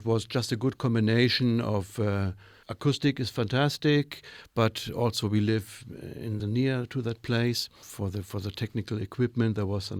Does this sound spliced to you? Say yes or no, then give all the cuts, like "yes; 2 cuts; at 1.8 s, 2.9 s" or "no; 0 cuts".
yes; 1 cut; at 6.4 s